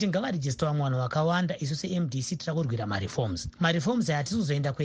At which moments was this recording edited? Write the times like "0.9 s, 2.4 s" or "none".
none